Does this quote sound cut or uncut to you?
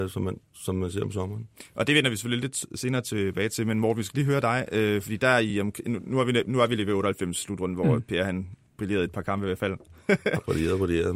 uncut